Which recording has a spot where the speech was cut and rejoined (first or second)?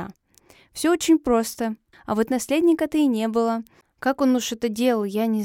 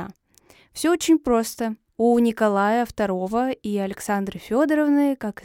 first